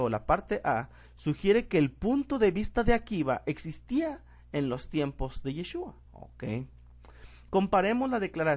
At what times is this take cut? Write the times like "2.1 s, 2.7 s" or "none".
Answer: 6.0 s